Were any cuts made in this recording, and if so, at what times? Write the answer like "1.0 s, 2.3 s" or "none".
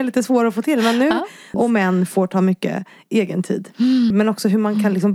1.5 s, 4.1 s